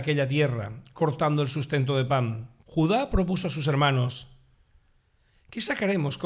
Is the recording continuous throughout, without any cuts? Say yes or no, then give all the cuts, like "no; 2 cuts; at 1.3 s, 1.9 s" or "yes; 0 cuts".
no; 1 cut; at 2.6 s